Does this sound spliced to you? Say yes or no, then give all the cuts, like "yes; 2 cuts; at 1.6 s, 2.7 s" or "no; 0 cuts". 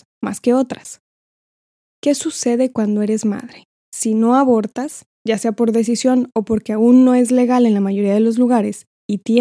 yes; 1 cut; at 3.8 s